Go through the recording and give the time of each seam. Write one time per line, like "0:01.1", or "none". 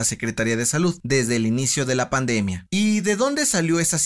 none